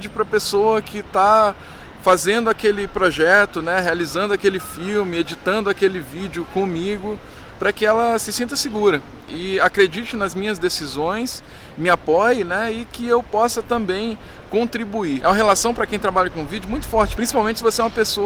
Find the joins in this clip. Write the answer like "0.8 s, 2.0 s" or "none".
none